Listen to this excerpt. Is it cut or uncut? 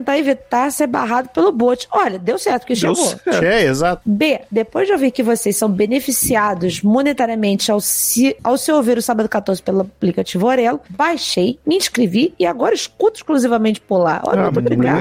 uncut